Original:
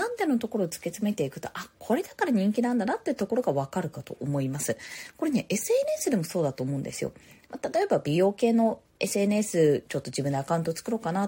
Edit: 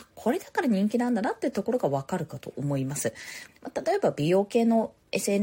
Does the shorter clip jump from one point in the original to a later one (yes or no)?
yes